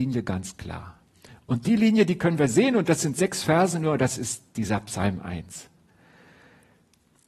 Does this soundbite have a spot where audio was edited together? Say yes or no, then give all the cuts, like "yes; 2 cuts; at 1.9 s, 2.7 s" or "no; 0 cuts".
no; 0 cuts